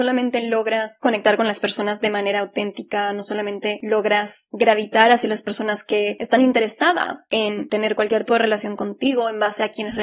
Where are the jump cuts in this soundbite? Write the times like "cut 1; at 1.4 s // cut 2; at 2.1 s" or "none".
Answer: cut 1; at 8.3 s